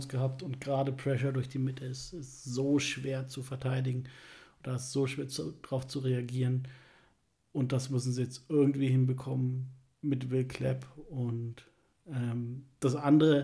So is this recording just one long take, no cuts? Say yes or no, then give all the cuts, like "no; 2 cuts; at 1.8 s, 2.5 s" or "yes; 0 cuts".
yes; 0 cuts